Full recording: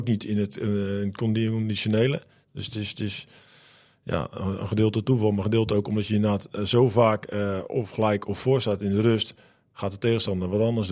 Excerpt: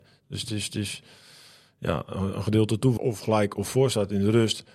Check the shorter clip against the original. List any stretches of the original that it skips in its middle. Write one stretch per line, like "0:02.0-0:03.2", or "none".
0:05.2-0:07.7